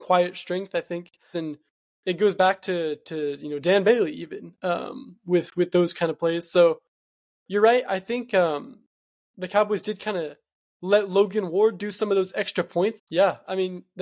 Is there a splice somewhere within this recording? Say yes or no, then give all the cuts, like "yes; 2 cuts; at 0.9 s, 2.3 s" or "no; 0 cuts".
yes; 2 cuts; at 1.3 s, 13.0 s